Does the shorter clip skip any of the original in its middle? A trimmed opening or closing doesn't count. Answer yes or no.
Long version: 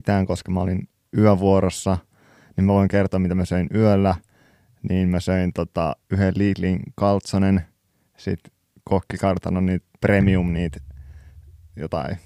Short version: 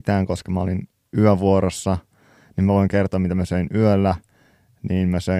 no